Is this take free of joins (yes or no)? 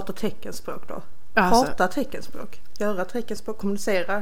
no